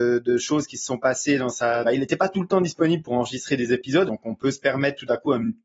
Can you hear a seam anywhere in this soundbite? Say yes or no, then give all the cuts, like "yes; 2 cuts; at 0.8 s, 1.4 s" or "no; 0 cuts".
yes; 2 cuts; at 1.8 s, 4.1 s